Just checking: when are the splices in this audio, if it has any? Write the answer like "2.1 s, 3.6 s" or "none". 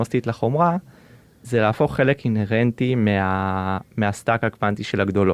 none